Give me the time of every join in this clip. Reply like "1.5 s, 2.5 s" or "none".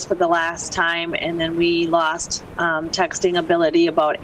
none